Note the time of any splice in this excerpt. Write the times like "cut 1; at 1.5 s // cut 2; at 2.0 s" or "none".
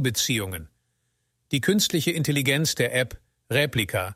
none